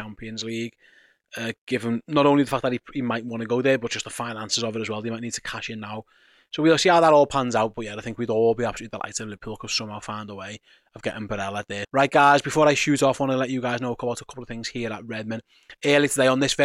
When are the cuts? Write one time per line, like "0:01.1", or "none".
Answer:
0:11.8